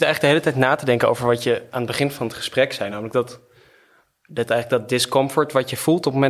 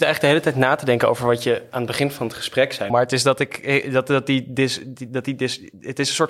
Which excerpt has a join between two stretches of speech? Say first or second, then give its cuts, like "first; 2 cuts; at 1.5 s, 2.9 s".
second; 1 cut; at 2.9 s